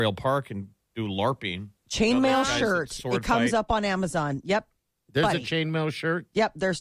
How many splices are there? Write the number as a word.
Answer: one